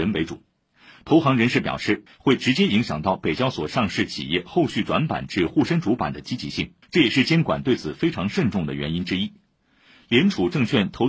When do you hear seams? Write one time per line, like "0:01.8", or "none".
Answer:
0:02.1
0:06.8